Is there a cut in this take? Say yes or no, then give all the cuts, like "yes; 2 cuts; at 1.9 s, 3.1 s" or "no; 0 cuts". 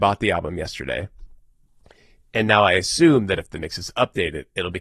no; 0 cuts